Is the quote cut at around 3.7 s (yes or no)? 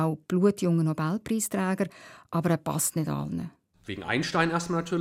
yes